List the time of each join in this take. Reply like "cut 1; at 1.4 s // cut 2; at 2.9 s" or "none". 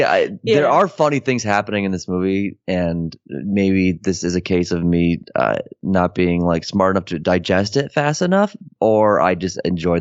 none